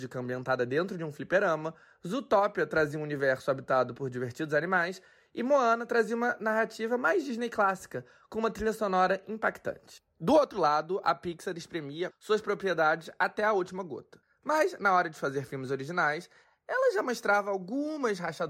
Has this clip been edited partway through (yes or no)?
yes